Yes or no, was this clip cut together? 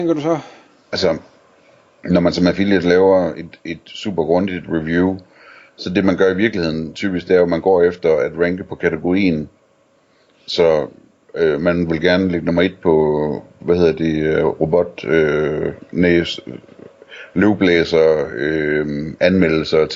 no